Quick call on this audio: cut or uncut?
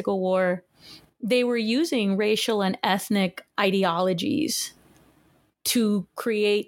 uncut